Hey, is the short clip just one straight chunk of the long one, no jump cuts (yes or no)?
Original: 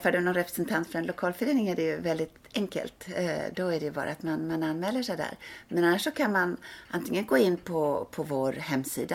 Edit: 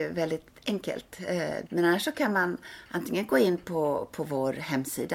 no